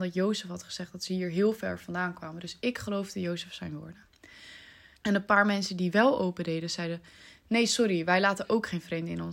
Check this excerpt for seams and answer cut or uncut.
cut